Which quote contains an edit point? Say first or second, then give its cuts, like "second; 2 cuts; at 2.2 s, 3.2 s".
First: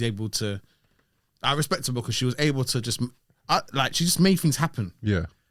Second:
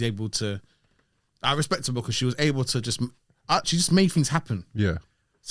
second; 1 cut; at 3.6 s